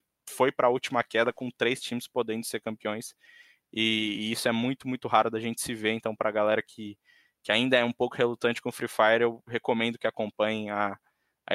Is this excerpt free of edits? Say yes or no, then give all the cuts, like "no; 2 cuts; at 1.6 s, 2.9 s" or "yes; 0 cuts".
yes; 0 cuts